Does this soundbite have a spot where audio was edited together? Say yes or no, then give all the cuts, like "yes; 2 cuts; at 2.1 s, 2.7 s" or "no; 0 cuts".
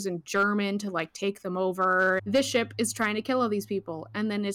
yes; 1 cut; at 2.2 s